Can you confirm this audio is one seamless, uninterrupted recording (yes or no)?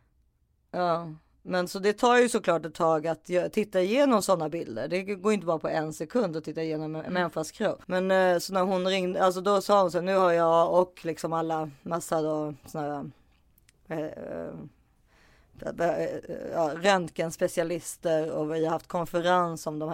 no